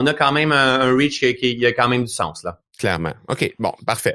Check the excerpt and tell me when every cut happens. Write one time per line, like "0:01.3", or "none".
0:02.7